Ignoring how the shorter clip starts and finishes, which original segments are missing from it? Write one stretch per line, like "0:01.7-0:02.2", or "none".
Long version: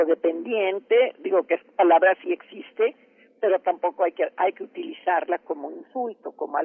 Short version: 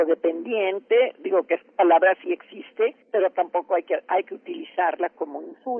0:03.0-0:03.3